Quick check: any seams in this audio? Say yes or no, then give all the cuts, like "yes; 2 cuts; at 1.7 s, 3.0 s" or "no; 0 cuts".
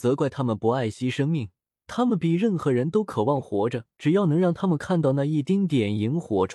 yes; 2 cuts; at 1.7 s, 3.9 s